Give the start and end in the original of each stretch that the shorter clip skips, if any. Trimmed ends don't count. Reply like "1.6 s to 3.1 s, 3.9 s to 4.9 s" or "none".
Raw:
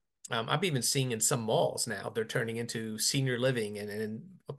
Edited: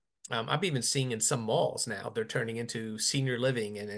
none